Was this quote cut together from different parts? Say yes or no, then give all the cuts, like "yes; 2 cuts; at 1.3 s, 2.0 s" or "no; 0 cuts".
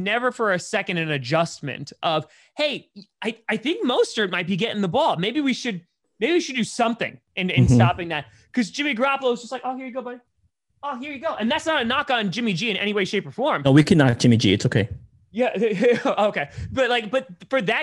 no; 0 cuts